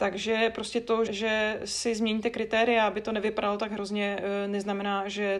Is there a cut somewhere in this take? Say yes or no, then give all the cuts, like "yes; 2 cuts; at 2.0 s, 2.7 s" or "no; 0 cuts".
yes; 1 cut; at 1.1 s